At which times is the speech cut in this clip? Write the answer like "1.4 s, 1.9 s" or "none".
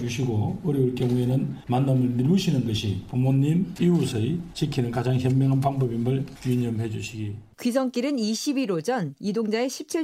3.8 s